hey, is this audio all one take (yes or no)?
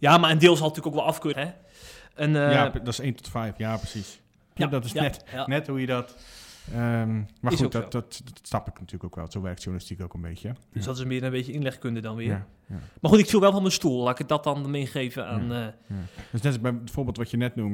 no